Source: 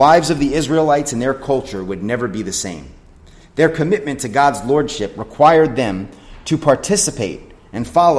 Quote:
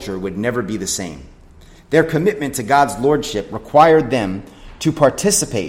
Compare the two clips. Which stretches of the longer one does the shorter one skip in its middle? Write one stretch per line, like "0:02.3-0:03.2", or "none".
none